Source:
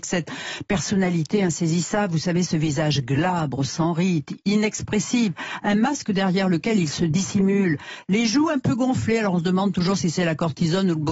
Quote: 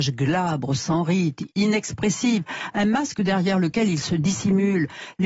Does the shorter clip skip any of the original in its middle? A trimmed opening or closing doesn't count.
no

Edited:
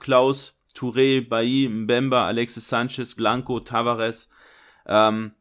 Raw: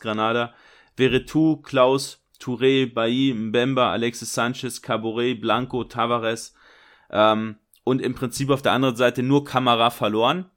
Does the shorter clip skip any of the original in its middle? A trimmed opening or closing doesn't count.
yes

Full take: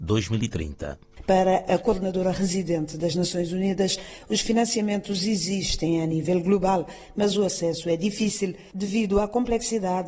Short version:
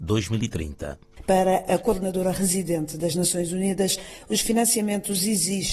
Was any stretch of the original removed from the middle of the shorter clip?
no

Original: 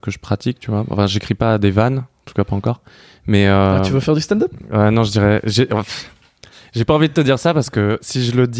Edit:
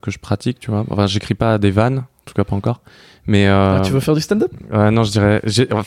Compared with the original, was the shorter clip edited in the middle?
no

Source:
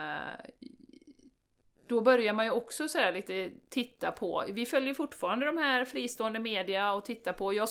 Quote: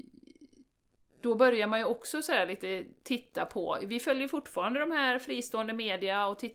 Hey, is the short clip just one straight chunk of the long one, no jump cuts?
yes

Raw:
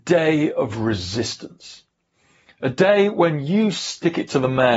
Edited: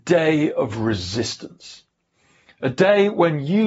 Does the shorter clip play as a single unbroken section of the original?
yes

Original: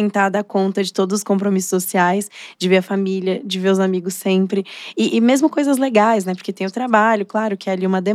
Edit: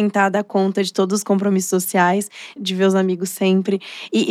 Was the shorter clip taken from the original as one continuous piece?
no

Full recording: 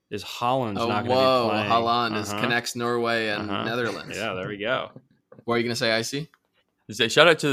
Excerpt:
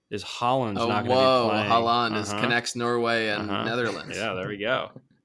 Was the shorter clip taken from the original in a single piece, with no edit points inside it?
yes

